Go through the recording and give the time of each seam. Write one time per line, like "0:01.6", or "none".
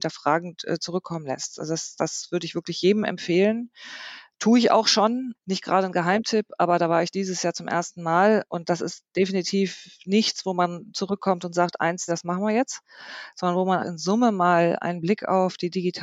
0:05.3
0:12.1
0:13.8